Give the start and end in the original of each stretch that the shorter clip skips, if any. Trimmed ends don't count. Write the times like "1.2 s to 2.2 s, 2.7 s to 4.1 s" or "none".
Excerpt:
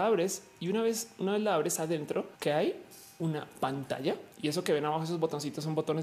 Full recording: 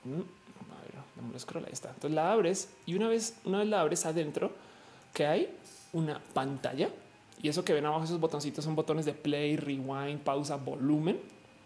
4.6 s to 5.1 s, 7.1 s to 7.3 s